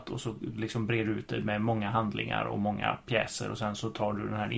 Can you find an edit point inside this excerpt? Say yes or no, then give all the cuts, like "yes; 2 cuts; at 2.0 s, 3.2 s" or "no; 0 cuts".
no; 0 cuts